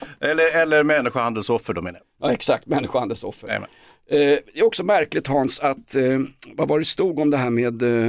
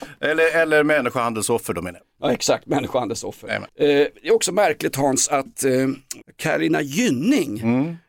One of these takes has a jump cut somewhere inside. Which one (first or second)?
second